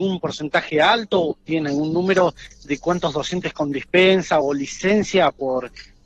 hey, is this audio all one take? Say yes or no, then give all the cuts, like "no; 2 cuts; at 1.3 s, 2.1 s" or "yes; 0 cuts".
no; 1 cut; at 4.4 s